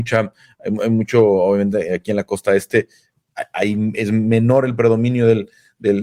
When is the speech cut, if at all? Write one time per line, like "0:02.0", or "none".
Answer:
none